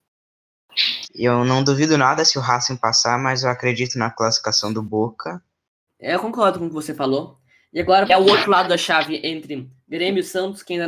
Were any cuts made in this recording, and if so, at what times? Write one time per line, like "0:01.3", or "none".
0:01.1
0:05.9
0:08.1